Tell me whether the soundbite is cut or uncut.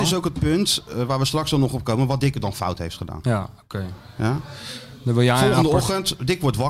uncut